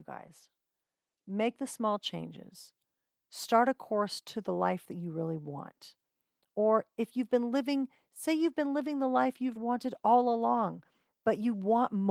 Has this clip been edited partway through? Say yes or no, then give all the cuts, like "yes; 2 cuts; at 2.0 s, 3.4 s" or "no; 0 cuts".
yes; 1 cut; at 9.6 s